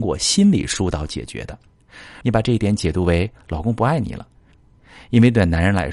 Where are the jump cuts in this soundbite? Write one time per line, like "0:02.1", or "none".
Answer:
0:02.2
0:04.5